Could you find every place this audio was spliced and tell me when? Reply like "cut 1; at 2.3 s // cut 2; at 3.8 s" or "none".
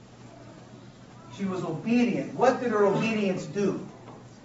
none